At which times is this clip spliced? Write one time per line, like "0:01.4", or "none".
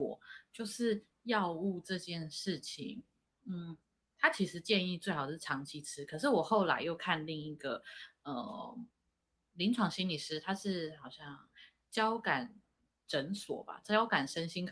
none